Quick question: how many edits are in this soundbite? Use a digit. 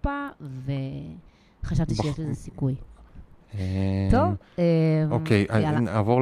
0